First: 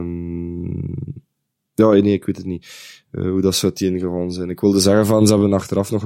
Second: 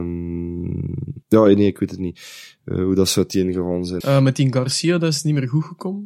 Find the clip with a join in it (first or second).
second